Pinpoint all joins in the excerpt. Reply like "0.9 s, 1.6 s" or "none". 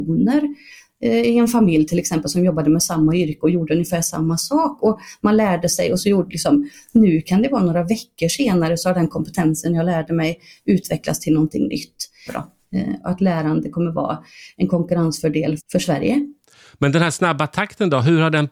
12.3 s, 15.6 s